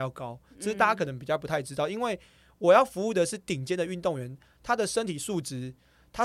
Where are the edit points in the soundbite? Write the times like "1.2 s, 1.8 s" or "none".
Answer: none